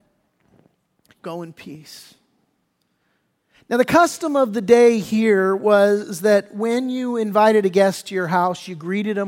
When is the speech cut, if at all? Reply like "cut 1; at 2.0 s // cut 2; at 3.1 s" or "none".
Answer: cut 1; at 1.1 s